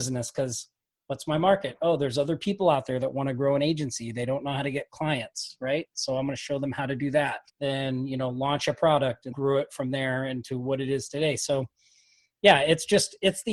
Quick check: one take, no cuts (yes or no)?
no